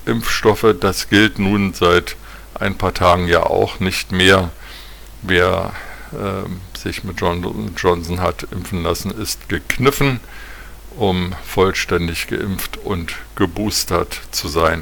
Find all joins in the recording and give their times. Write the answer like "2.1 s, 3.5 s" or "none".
10.9 s

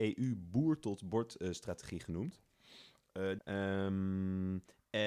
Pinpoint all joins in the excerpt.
3.4 s

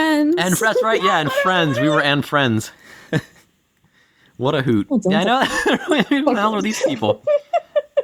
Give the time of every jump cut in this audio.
4.9 s

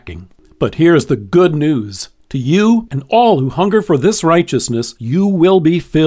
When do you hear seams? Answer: 2.9 s, 5.0 s

